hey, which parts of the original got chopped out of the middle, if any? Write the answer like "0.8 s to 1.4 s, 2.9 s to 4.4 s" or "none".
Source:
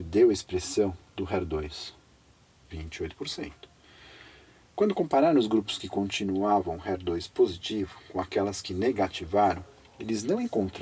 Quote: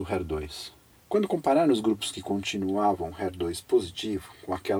2.1 s to 4.6 s